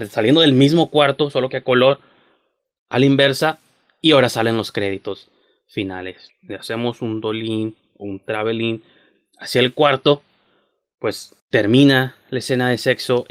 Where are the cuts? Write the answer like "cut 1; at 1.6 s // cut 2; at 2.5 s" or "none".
cut 1; at 6.3 s // cut 2; at 11.4 s